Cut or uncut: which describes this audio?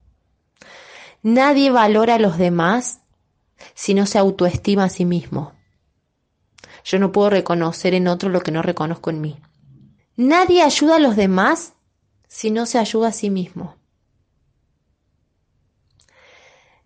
cut